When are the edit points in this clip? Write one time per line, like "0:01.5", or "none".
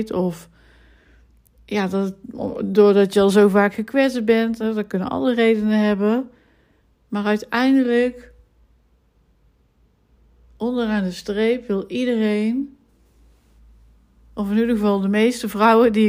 none